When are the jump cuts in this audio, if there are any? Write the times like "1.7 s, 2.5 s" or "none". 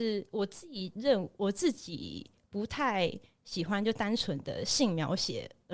none